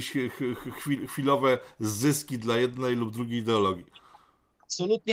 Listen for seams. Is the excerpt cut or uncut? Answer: uncut